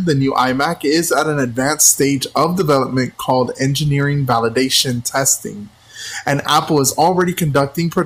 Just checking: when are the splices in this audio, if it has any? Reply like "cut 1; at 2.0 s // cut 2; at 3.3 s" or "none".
none